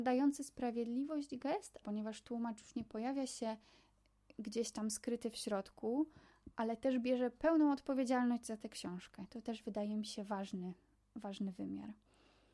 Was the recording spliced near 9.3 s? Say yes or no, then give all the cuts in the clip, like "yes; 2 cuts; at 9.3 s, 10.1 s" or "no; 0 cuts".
no; 1 cut; at 1.8 s